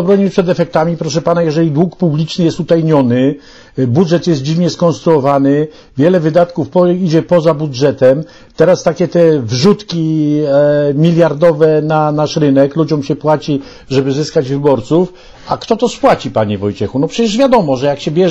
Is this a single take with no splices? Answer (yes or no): yes